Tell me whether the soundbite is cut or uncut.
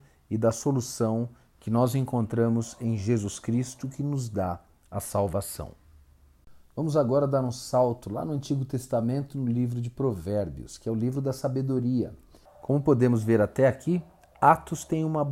cut